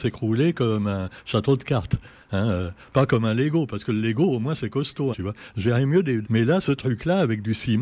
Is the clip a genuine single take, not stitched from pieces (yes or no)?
no